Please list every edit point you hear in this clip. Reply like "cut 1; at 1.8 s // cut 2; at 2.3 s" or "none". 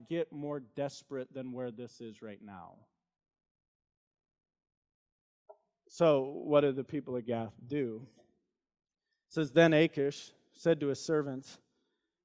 none

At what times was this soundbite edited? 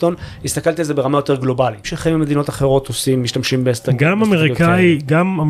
cut 1; at 1.8 s

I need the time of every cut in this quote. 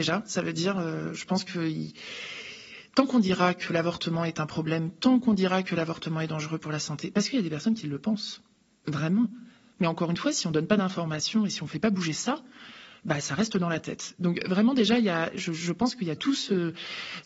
none

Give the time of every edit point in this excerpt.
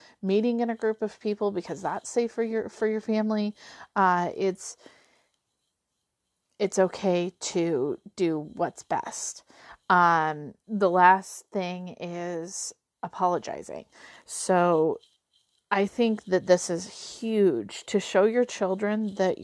none

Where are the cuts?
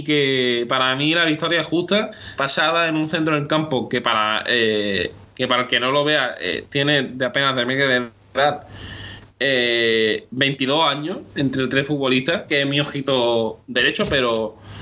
cut 1; at 2.4 s // cut 2; at 12.5 s

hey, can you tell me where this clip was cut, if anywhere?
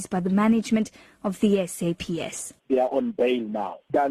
cut 1; at 2.6 s

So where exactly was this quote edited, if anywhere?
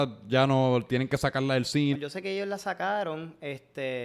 cut 1; at 1.9 s

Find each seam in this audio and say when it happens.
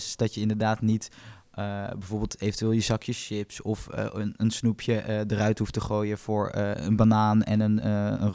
none

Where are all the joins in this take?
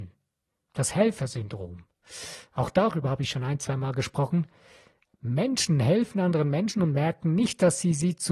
none

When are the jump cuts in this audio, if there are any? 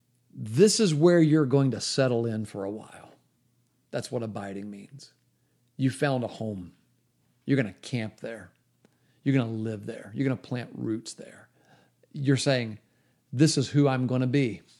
none

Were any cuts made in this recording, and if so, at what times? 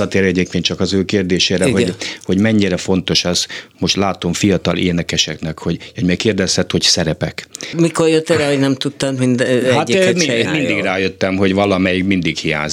cut 1; at 7.7 s // cut 2; at 10.5 s

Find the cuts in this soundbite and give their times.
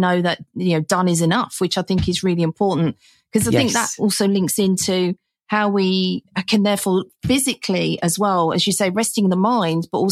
none

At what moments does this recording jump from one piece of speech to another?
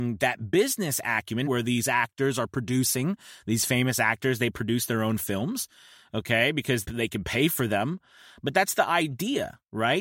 cut 1; at 1.5 s // cut 2; at 6.8 s

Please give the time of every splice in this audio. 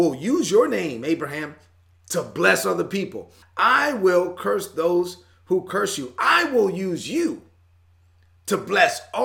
cut 1; at 3.4 s

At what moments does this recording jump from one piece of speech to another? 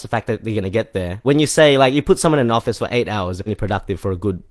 cut 1; at 1.2 s // cut 2; at 3.5 s

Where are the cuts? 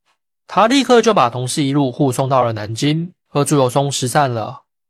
cut 1; at 3.3 s

